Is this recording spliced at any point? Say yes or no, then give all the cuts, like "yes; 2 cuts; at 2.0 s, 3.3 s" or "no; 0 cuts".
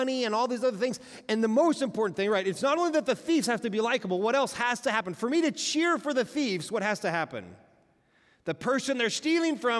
no; 0 cuts